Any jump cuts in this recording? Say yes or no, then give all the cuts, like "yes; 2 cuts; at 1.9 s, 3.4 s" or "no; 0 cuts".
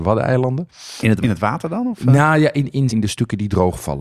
yes; 2 cuts; at 1.2 s, 2.9 s